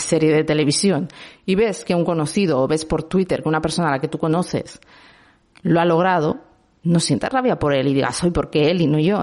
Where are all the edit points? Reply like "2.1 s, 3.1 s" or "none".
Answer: none